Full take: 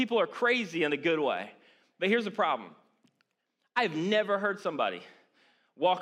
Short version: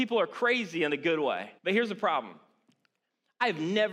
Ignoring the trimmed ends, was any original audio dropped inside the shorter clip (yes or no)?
yes